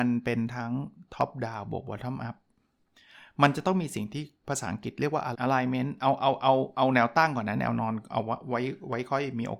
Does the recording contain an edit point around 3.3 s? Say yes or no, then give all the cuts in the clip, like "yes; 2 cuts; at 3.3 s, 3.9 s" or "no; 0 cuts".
no; 1 cut; at 5.3 s